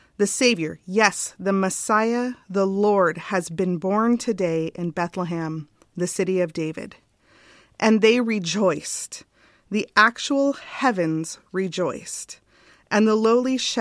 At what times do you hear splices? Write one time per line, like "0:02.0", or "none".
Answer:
none